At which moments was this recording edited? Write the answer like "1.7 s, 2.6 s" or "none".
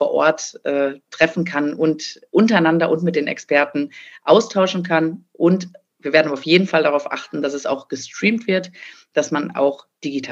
none

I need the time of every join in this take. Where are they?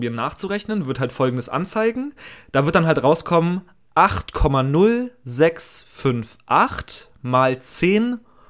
none

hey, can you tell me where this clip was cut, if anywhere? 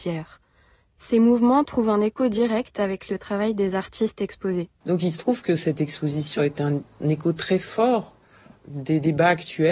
4.8 s

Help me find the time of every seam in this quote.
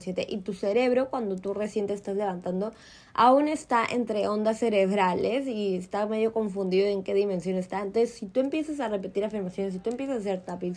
none

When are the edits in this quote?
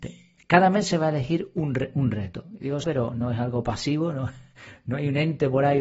2.8 s

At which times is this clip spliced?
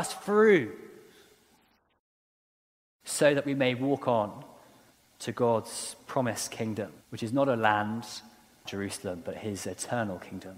7.0 s, 8.7 s

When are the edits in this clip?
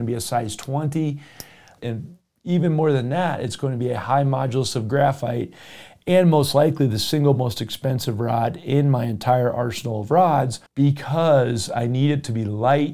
1.8 s, 10.7 s

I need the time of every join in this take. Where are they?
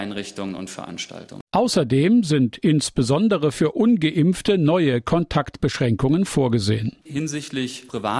none

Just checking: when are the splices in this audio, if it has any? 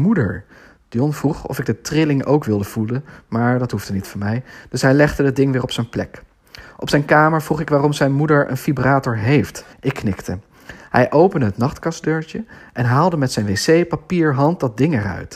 9.7 s

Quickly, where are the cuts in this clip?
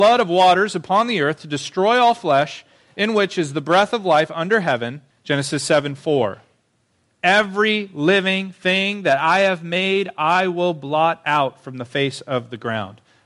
5.1 s

